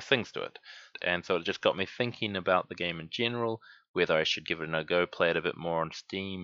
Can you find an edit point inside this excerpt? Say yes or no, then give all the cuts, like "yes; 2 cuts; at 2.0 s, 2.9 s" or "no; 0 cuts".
yes; 1 cut; at 0.9 s